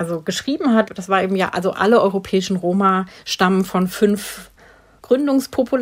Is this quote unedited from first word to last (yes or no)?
yes